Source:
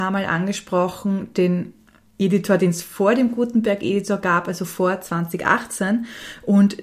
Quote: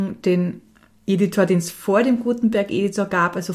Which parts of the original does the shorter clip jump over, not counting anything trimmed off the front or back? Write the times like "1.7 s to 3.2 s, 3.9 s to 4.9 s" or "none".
none